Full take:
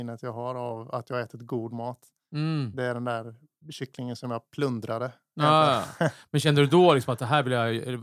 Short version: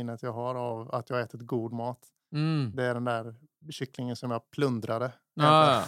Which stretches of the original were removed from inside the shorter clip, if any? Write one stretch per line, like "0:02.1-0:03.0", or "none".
none

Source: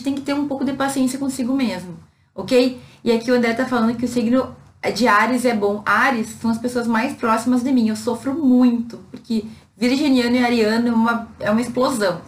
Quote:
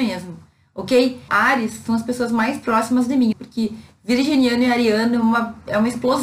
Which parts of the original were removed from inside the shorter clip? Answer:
0:02.9-0:05.8
0:07.9-0:09.1

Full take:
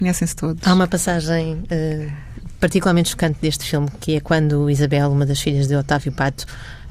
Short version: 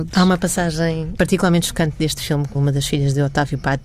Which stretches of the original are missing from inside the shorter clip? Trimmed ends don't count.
0:01.7-0:02.6
0:04.0-0:05.1

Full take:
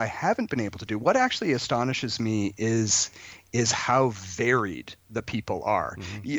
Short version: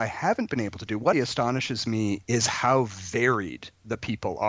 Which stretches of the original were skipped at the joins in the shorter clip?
0:01.1-0:01.5
0:02.6-0:03.5

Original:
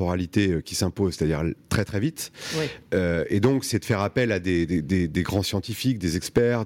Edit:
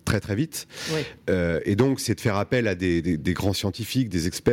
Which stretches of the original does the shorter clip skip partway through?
0:04.8-0:05.1

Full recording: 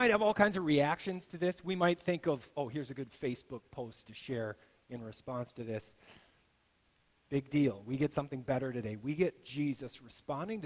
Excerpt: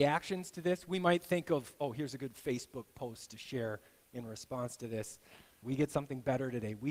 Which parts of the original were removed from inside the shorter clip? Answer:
0:06.4-0:07.8

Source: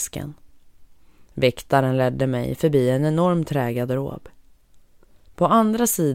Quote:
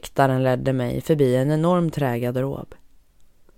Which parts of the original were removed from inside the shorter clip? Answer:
none

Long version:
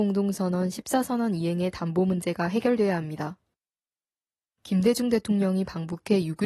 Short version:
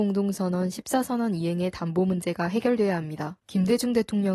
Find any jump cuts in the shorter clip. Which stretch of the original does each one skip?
0:03.4-0:04.6

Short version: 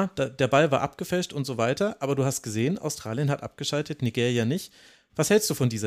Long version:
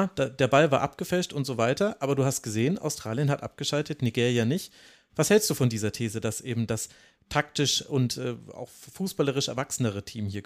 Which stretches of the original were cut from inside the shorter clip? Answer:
none

